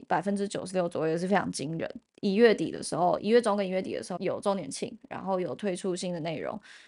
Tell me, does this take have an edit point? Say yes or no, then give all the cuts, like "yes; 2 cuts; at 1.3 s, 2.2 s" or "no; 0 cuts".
yes; 2 cuts; at 2.1 s, 4.2 s